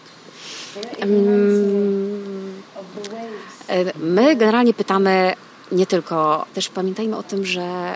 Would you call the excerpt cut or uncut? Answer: cut